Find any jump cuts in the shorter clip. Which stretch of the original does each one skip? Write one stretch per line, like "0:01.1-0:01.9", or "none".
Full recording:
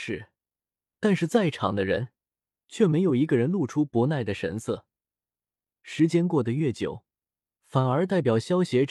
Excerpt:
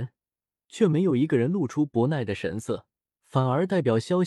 0:05.1-0:07.5